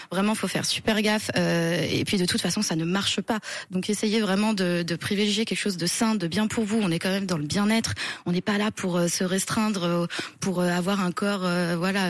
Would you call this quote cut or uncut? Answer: uncut